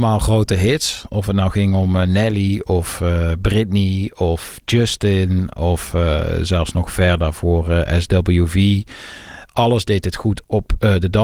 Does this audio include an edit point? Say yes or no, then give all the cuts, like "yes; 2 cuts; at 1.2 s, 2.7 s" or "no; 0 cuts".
no; 0 cuts